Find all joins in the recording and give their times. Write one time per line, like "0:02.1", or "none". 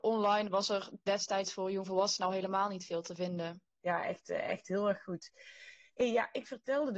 none